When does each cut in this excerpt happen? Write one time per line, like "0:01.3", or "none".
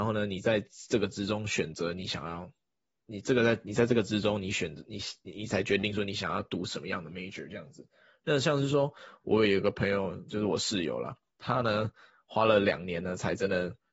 none